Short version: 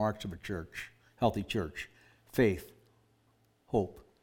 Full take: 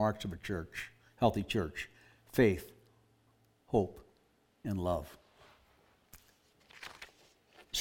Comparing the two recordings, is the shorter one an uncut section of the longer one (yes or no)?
yes